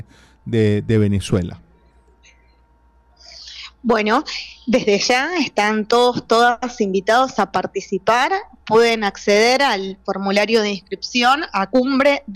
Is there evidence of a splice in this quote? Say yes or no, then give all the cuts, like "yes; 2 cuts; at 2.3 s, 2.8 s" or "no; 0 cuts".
no; 0 cuts